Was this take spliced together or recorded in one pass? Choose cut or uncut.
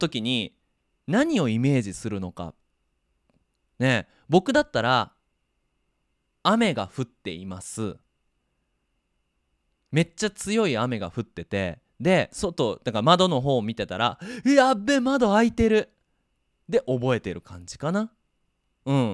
uncut